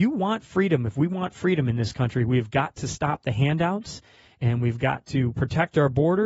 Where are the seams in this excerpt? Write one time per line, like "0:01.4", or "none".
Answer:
none

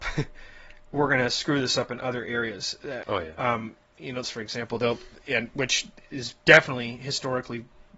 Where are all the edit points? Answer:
0:03.0
0:04.2

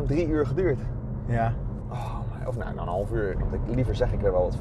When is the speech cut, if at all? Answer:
0:01.8
0:03.4

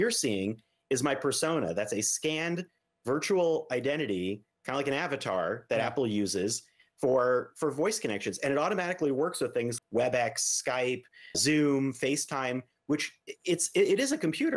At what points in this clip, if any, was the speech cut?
0:09.8
0:11.3

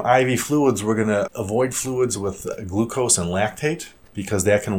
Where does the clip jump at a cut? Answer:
0:01.3

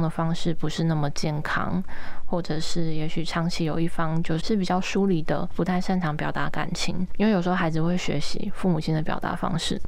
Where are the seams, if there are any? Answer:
0:04.4

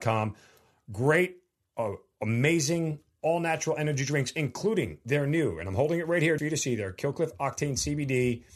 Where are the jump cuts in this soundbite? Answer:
0:06.4

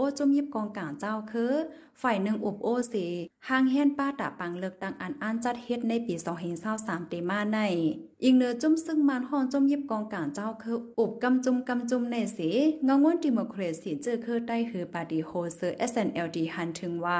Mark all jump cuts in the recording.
0:08.1

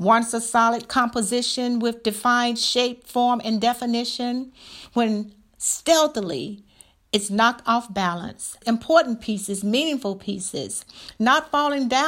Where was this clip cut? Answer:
0:08.6

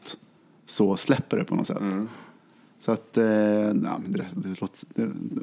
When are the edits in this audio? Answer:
none

